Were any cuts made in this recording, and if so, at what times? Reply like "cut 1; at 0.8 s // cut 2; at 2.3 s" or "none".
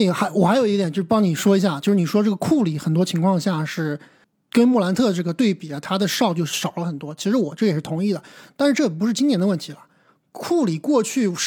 none